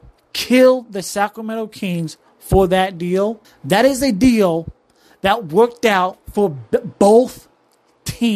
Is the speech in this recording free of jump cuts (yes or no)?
no